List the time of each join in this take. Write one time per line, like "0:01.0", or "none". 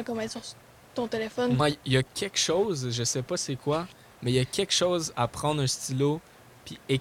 0:01.6